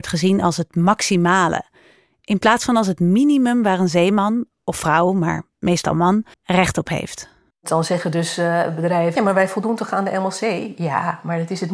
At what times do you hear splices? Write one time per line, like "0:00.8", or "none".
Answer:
0:06.3
0:09.2